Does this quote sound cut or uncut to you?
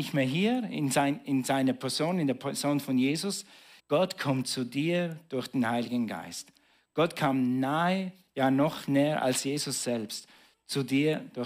cut